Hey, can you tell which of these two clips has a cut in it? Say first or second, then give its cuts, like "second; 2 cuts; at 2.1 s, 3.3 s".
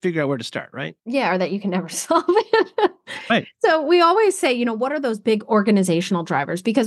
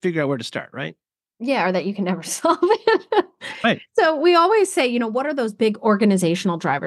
first; 1 cut; at 1.0 s